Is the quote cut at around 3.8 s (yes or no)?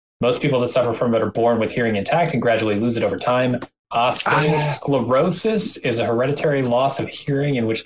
yes